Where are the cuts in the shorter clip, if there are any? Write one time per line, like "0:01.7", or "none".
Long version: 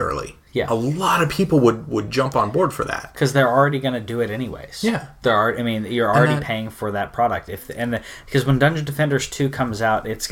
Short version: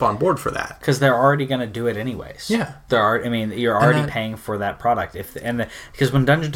none